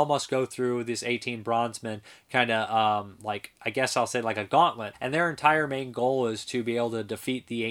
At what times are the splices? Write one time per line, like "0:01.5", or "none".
0:04.9